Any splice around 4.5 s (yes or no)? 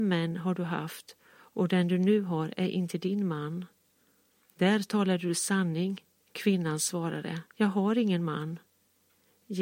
no